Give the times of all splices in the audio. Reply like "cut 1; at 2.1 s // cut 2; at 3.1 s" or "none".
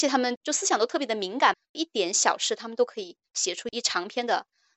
none